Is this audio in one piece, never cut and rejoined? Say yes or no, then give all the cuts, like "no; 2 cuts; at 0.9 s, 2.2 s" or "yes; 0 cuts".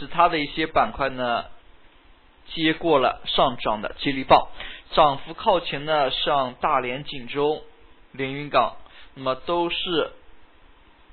no; 1 cut; at 4.8 s